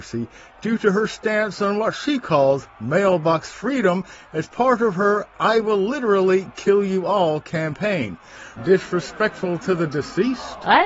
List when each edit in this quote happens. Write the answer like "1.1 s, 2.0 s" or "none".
8.6 s